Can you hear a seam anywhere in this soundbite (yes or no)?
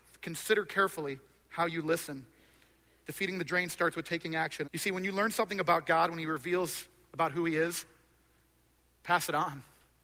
yes